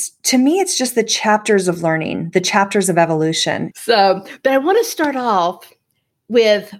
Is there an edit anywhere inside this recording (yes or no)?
yes